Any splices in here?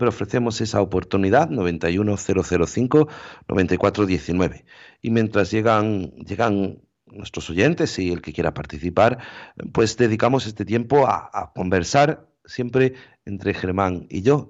no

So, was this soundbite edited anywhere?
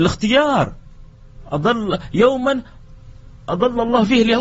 yes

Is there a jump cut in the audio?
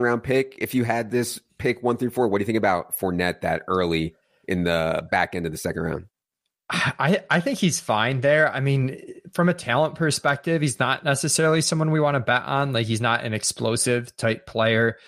no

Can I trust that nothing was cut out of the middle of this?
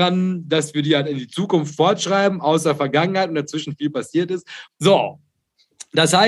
no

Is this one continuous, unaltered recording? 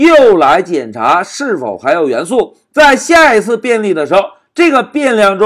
no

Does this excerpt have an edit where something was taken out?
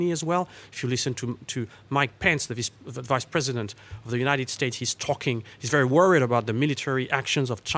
no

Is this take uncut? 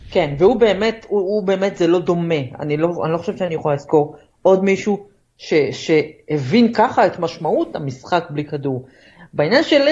yes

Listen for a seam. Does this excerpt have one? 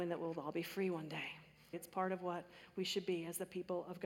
yes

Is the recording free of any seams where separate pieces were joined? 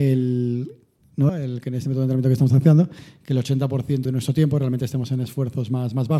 no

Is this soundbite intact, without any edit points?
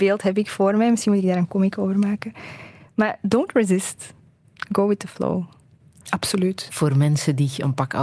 no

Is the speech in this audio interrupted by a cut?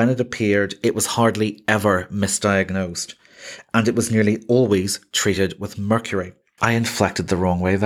yes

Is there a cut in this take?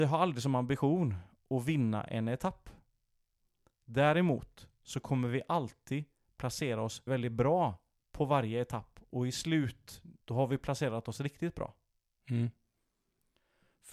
yes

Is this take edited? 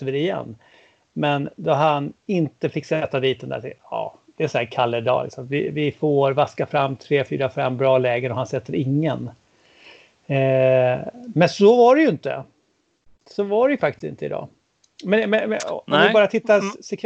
no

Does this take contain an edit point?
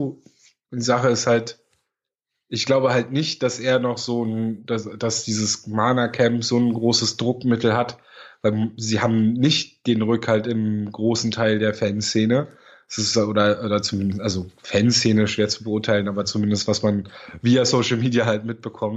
no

